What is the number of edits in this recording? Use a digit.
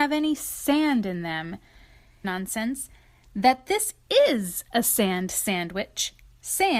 1